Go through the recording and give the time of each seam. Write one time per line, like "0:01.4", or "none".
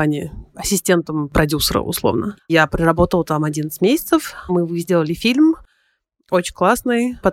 0:02.4